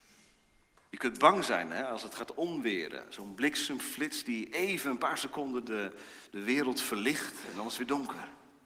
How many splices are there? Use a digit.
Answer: 0